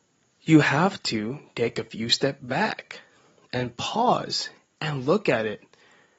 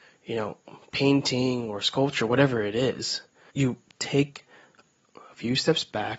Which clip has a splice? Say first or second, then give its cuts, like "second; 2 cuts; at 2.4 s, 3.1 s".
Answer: second; 1 cut; at 3.5 s